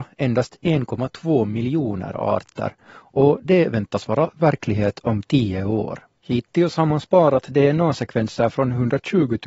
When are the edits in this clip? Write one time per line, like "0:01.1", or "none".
0:06.2